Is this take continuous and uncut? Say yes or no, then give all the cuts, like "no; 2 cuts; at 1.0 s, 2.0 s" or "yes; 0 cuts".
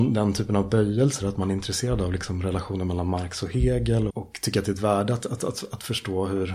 no; 1 cut; at 4.1 s